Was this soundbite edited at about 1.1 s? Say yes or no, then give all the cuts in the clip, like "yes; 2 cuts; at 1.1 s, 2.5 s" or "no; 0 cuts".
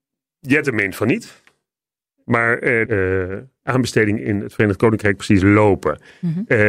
no; 1 cut; at 2.9 s